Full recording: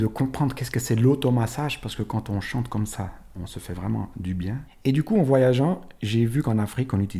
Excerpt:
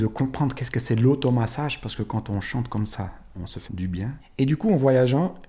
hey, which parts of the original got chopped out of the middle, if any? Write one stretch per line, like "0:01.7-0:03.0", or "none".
0:03.7-0:04.1